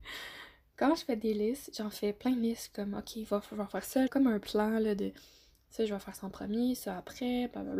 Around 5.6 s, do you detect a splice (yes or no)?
no